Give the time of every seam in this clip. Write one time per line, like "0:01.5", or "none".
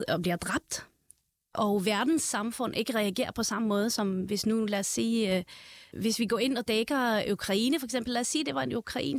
0:05.9